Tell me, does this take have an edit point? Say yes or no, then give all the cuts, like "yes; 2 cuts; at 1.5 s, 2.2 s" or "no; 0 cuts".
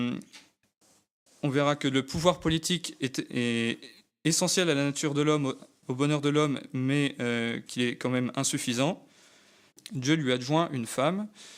yes; 1 cut; at 9.7 s